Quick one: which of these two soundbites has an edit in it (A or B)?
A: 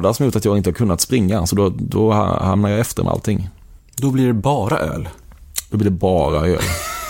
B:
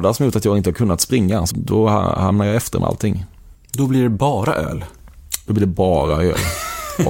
B